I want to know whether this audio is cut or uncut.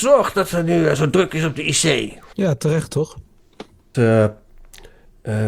cut